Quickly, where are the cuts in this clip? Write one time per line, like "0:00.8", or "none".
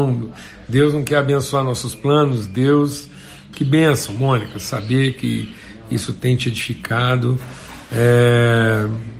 0:03.5